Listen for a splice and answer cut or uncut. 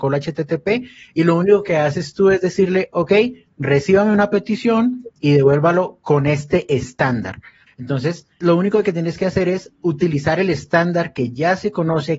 cut